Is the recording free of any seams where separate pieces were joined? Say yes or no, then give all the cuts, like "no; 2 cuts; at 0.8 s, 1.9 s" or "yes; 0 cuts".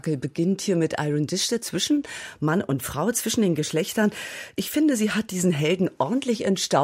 yes; 0 cuts